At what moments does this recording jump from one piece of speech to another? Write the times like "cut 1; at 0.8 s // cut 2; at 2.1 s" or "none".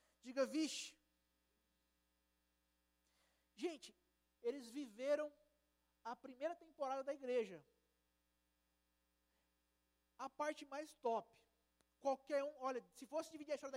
cut 1; at 4.4 s